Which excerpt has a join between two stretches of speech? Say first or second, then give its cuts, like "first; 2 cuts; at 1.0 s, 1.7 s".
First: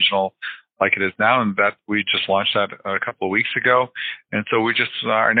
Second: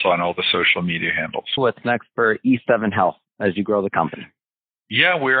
second; 1 cut; at 1.6 s